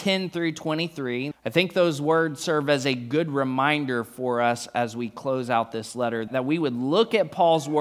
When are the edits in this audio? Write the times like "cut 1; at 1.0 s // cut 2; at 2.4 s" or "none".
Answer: cut 1; at 1.3 s // cut 2; at 6.3 s